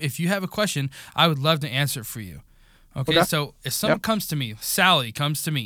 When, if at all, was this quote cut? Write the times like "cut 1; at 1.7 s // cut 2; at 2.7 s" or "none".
none